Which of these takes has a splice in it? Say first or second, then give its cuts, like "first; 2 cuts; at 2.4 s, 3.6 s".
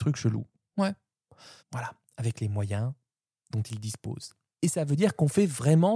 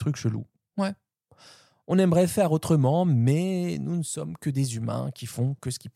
first; 1 cut; at 1.6 s